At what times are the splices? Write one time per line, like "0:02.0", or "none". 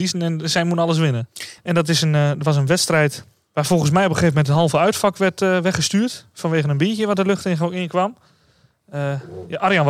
0:01.6